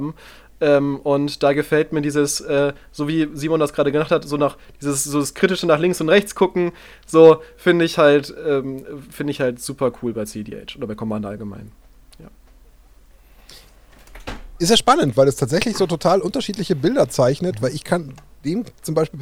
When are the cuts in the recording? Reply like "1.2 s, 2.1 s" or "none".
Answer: none